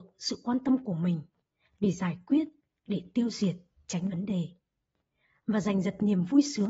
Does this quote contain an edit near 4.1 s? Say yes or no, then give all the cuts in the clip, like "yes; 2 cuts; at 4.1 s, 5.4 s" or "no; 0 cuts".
yes; 1 cut; at 4.1 s